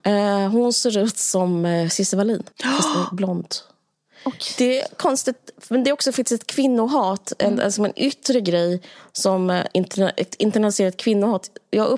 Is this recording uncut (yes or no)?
no